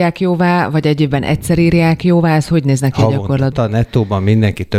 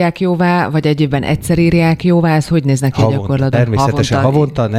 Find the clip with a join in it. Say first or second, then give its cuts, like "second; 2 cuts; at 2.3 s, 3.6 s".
first; 1 cut; at 3.5 s